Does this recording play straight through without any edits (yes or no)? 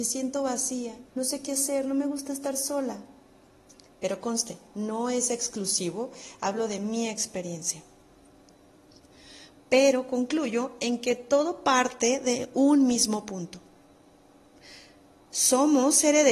no